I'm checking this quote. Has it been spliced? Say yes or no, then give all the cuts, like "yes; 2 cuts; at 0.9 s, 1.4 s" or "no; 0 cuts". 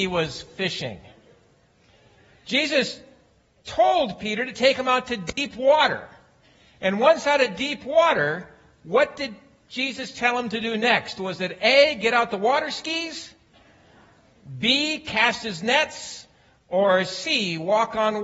no; 0 cuts